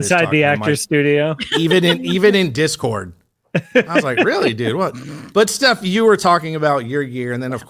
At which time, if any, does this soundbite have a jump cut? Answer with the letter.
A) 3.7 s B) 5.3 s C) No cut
C